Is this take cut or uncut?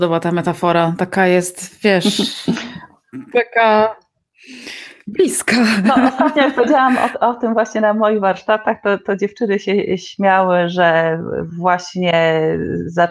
uncut